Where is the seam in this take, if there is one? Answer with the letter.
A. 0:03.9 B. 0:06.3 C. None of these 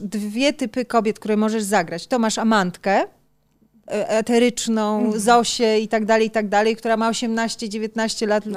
A